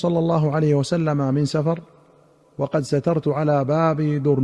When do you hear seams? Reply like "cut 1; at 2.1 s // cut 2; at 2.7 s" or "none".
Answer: none